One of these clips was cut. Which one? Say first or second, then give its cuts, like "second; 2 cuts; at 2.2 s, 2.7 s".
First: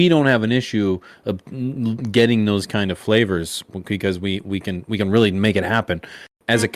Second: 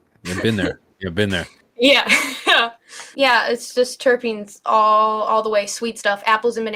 second; 1 cut; at 3.1 s